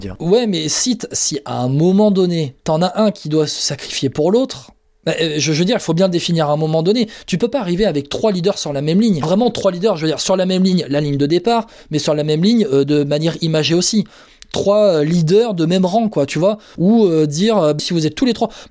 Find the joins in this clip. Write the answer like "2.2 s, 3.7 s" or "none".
9.2 s, 16.8 s, 17.8 s